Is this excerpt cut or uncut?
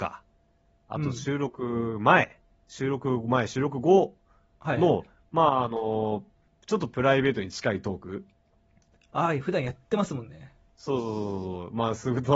uncut